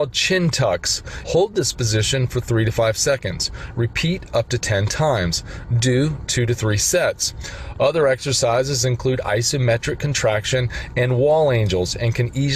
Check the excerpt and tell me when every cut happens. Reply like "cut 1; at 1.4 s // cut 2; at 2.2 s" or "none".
cut 1; at 1.2 s